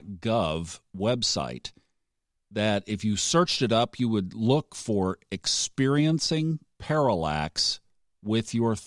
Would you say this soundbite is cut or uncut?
uncut